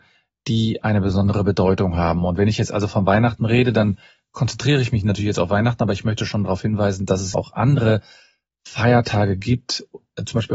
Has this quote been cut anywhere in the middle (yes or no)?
yes